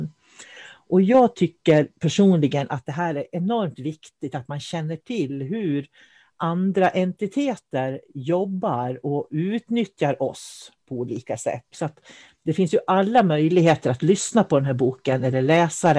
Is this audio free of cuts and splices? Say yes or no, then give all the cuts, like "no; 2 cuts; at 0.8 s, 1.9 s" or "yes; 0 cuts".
no; 1 cut; at 11.7 s